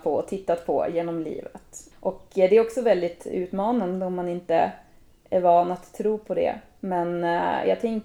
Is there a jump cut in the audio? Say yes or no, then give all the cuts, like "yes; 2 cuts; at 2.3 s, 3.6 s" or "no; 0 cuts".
yes; 1 cut; at 1.9 s